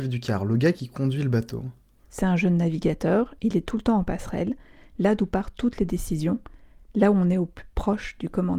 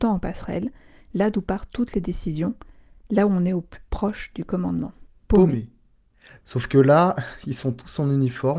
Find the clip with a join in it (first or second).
second